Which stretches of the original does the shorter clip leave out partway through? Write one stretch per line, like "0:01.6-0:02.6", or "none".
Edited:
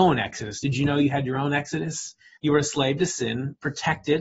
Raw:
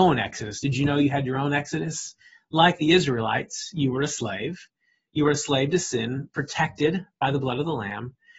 0:02.4-0:05.1